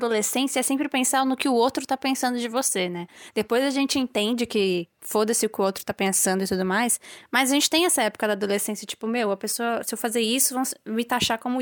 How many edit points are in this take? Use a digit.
0